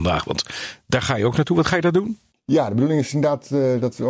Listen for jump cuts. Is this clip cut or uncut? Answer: uncut